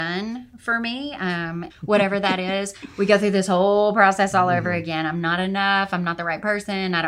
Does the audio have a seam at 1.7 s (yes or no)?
yes